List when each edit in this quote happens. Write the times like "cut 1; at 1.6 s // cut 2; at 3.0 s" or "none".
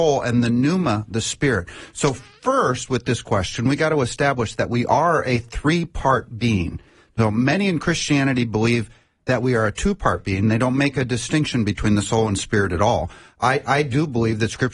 none